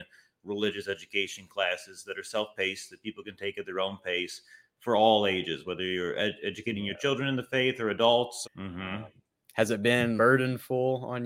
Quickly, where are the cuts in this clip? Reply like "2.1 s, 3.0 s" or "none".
8.4 s, 10.2 s